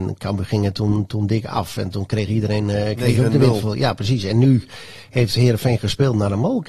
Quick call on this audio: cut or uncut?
uncut